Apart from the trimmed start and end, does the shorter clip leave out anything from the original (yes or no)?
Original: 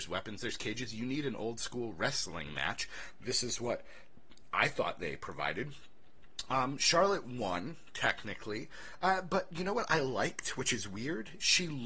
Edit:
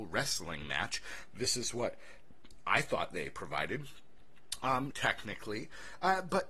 yes